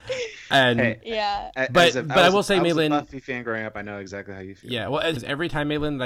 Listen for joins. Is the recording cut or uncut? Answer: cut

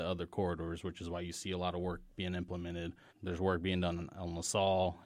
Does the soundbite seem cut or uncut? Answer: cut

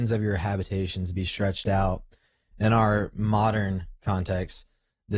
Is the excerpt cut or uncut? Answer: uncut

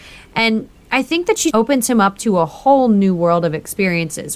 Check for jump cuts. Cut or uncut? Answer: cut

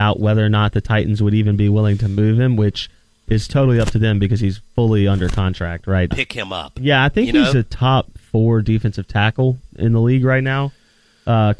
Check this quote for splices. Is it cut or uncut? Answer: cut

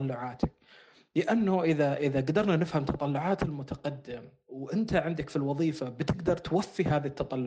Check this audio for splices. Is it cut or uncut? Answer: uncut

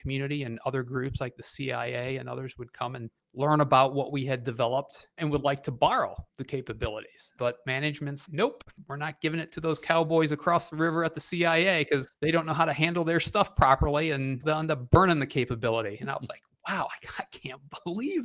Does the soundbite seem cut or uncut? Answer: cut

